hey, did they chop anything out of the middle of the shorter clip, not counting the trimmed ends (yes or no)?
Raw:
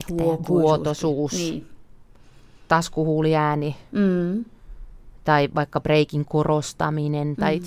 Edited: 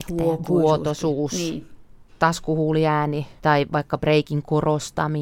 yes